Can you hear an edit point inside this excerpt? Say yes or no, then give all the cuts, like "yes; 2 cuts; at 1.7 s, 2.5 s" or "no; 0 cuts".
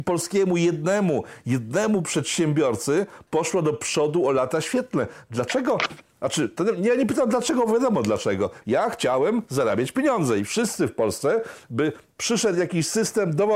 yes; 1 cut; at 8.6 s